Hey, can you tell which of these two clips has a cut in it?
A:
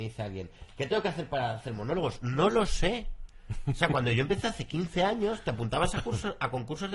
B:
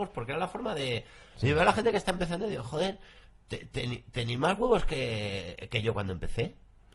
B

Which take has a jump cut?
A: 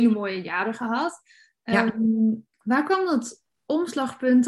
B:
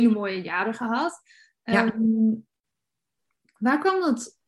A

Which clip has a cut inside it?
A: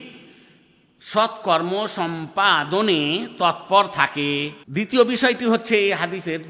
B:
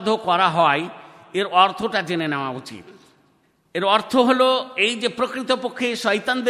A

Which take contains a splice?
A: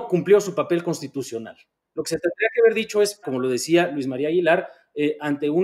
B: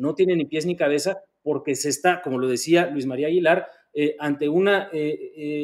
A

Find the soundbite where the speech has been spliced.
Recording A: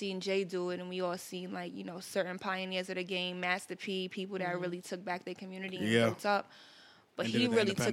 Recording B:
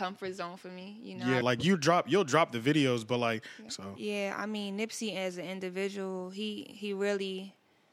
B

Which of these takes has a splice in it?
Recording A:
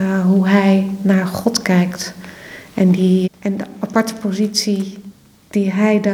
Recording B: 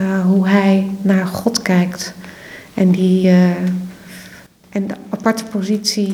A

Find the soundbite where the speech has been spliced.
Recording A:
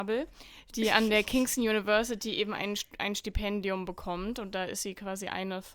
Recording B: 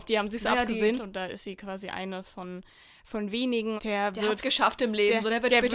B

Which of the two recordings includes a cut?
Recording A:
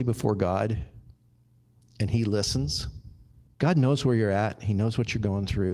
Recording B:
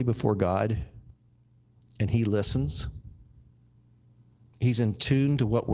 A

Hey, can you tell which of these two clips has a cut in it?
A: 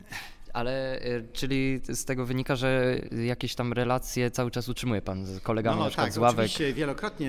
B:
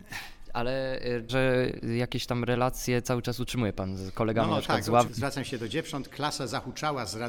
B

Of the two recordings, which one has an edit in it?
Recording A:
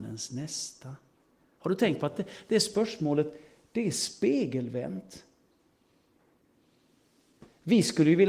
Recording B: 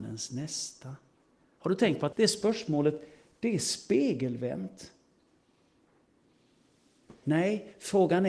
B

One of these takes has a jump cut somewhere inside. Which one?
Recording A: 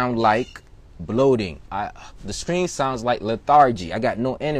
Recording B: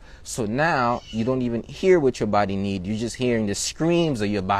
A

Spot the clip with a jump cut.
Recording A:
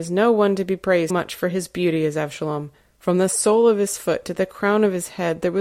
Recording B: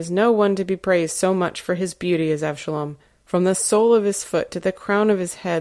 A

